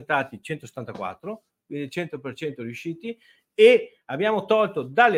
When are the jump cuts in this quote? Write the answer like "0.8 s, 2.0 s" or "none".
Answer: none